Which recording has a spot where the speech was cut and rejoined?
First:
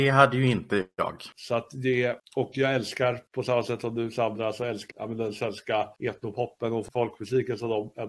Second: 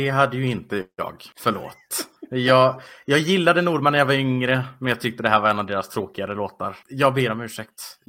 first; 2 cuts; at 1.3 s, 4.9 s

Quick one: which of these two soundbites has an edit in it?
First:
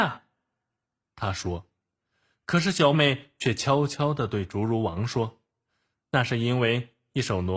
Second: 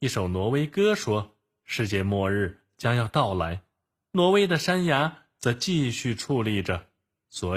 first; 1 cut; at 2.9 s

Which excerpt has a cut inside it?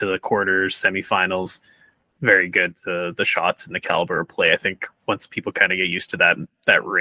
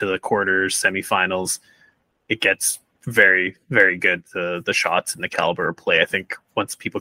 first; 1 cut; at 2.2 s

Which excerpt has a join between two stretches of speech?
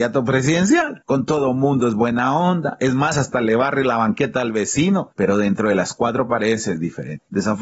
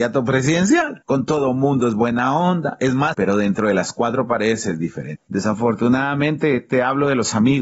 second; 1 cut; at 3.1 s

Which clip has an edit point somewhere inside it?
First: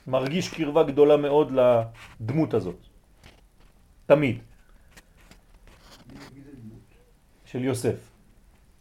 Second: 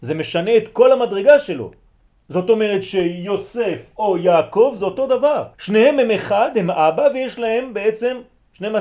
second; 1 cut; at 5.5 s

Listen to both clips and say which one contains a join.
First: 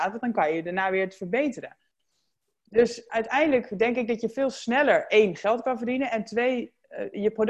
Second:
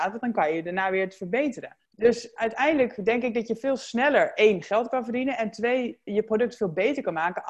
second; 2 cuts; at 1.9 s, 6.1 s

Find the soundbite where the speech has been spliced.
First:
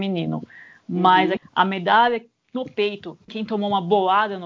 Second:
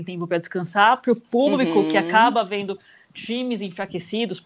first; 2 cuts; at 1.4 s, 3.3 s

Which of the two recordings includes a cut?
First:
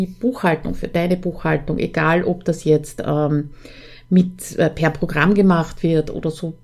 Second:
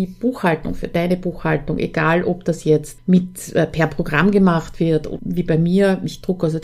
second; 2 cuts; at 3.0 s, 5.2 s

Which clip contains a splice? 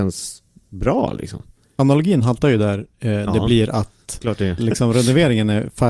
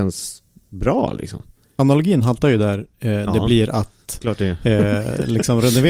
first; 1 cut; at 4.6 s

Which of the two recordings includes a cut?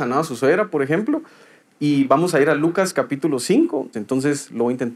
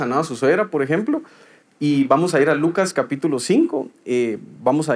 first; 1 cut; at 3.9 s

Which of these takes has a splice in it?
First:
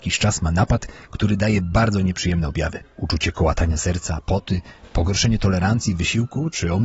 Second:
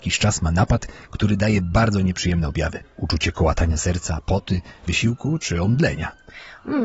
second; 1 cut; at 4.9 s

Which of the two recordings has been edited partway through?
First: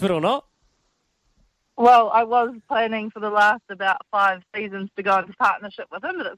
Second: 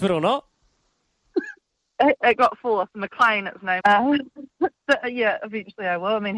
second; 2 cuts; at 1.3 s, 3.8 s

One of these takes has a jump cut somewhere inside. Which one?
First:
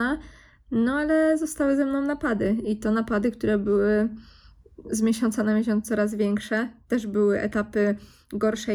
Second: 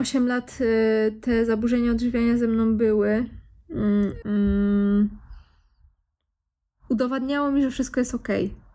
second; 1 cut; at 4.2 s

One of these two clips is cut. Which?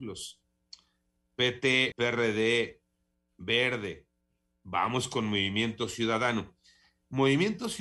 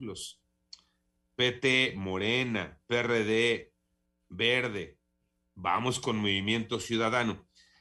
first; 1 cut; at 1.9 s

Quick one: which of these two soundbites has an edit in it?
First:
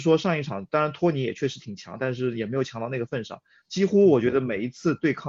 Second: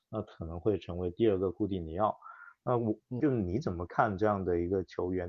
second; 1 cut; at 3.2 s

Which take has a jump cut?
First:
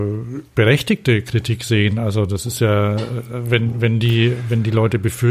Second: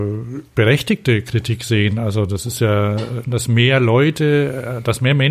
second; 1 cut; at 3.2 s

